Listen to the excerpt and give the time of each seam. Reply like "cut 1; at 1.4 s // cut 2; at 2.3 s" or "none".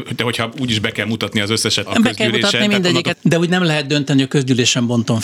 cut 1; at 1.9 s // cut 2; at 3.1 s